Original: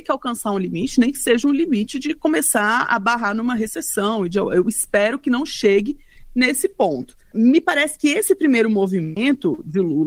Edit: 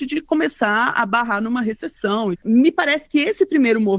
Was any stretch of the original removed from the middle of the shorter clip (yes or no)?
yes